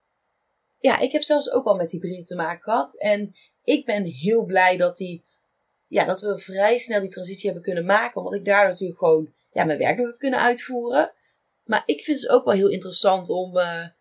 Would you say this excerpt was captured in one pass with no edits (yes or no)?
yes